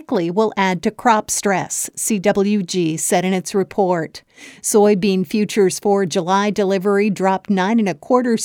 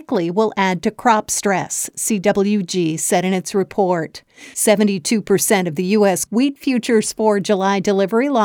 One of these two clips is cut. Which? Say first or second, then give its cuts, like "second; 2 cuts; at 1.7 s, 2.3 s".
second; 2 cuts; at 4.5 s, 6.3 s